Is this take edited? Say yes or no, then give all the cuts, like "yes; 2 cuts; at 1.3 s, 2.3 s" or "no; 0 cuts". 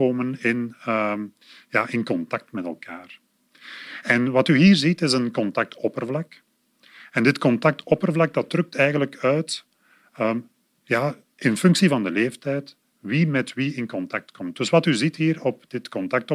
no; 0 cuts